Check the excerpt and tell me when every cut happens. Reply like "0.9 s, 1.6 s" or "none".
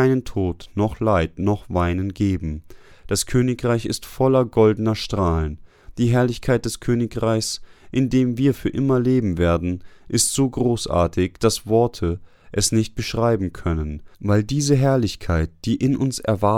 2.9 s, 14.1 s